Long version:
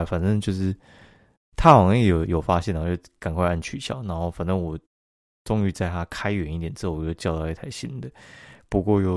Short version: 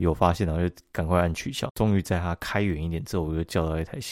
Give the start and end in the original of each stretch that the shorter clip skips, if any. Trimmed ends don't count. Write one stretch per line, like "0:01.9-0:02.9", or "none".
0:04.0-0:05.4